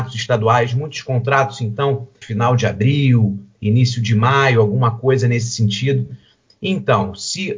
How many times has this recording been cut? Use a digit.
1